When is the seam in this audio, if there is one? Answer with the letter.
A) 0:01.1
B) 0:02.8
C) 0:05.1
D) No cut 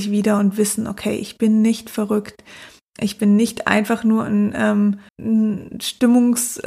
C